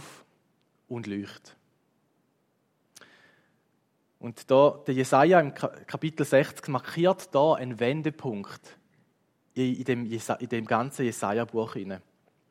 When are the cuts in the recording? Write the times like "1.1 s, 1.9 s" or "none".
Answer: none

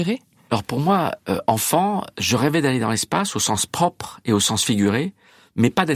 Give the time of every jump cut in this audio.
none

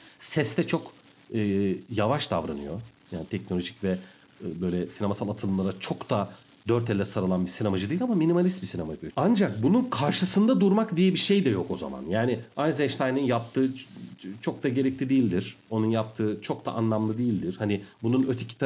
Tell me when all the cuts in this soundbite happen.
9.1 s

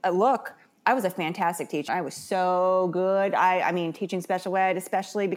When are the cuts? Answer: 1.9 s

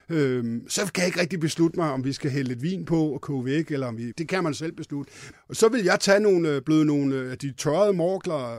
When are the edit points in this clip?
4.1 s, 5.3 s

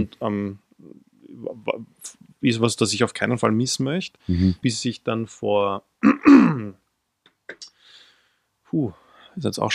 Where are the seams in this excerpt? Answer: 4.6 s

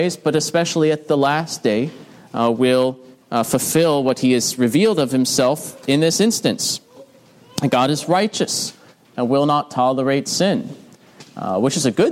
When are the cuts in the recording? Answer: none

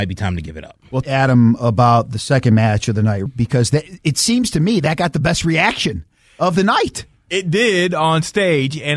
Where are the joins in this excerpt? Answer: 1.0 s, 3.3 s

